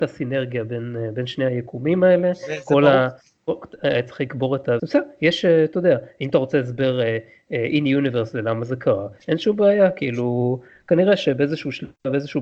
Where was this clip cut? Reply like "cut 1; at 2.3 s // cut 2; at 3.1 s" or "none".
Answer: cut 1; at 4.8 s

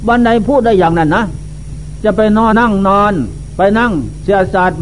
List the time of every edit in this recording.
cut 1; at 2.5 s

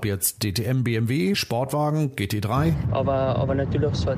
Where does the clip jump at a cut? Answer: cut 1; at 1.3 s // cut 2; at 2.9 s

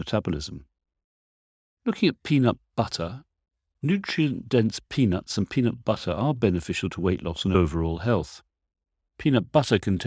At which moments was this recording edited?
cut 1; at 1.7 s

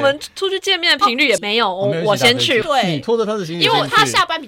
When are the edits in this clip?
cut 1; at 1.4 s // cut 2; at 2.6 s

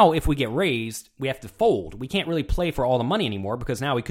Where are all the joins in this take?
none

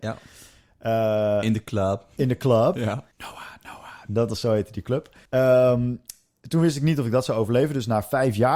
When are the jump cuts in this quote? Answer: cut 1; at 3.1 s // cut 2; at 5.3 s

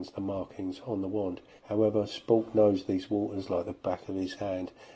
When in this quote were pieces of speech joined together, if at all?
cut 1; at 1.6 s

